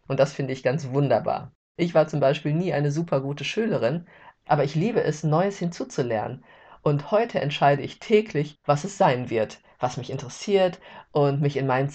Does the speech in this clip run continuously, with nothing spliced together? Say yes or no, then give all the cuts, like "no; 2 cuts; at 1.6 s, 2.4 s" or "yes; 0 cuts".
yes; 0 cuts